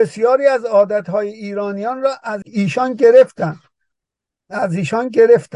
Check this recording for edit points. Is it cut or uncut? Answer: cut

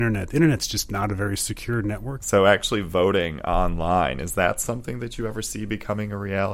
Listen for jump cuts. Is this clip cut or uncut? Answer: cut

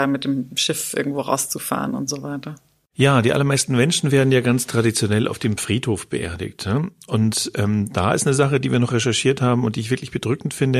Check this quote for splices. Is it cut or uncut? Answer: uncut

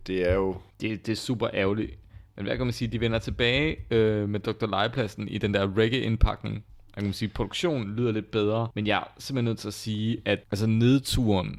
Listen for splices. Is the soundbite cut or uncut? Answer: uncut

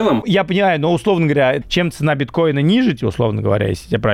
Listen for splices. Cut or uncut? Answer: cut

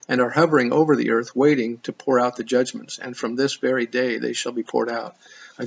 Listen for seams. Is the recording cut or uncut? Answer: uncut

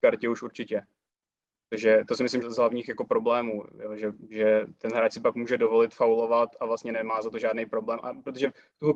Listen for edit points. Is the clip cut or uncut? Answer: cut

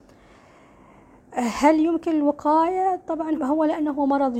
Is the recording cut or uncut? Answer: cut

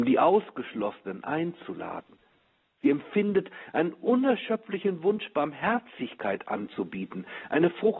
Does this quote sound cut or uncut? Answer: uncut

